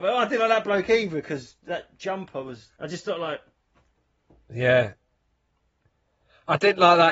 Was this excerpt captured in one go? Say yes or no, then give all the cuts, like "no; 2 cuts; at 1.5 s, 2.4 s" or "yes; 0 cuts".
no; 1 cut; at 2.8 s